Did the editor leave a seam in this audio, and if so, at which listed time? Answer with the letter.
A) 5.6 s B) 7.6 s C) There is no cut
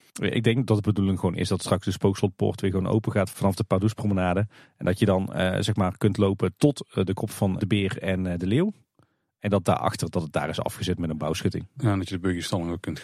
B